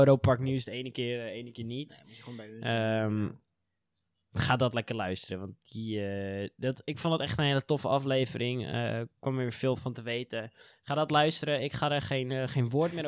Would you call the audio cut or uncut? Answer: uncut